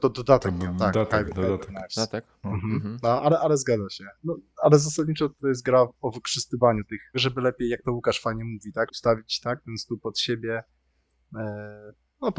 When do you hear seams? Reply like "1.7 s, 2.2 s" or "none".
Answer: 7.1 s, 8.9 s